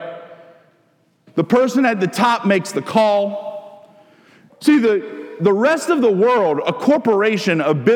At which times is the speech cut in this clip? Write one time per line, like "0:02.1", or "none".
0:01.3
0:04.5